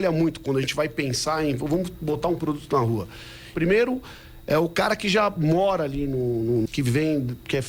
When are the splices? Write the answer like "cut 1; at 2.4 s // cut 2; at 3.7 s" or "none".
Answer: cut 1; at 3.5 s // cut 2; at 6.7 s

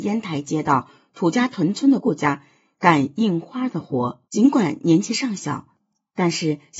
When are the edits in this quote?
cut 1; at 2.0 s // cut 2; at 4.2 s

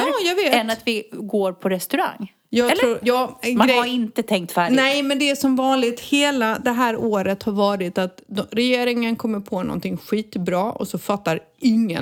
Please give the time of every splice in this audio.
cut 1; at 3.0 s

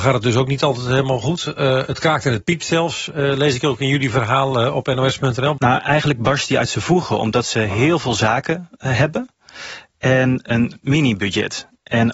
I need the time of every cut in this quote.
cut 1; at 5.6 s

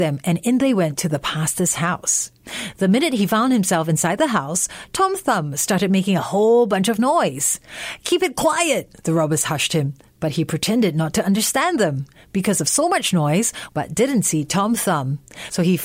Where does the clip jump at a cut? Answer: cut 1; at 13.7 s

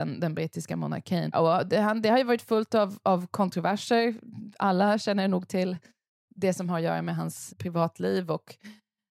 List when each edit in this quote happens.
cut 1; at 1.3 s // cut 2; at 7.5 s

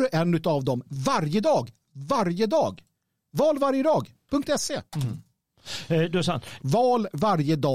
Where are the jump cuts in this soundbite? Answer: cut 1; at 4.9 s // cut 2; at 6.6 s

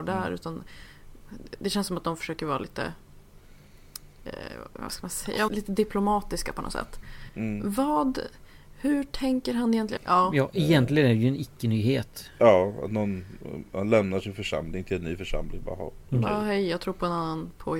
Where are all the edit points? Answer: cut 1; at 5.5 s // cut 2; at 7.3 s // cut 3; at 10.0 s

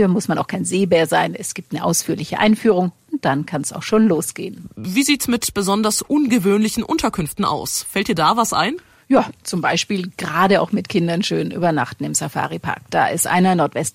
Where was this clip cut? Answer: none

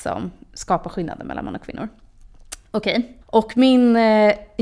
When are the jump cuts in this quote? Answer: cut 1; at 3.2 s

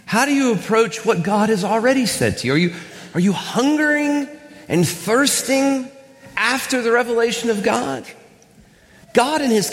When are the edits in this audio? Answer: none

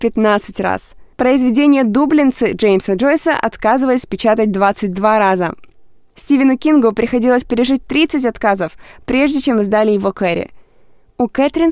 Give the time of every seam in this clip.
cut 1; at 1.1 s

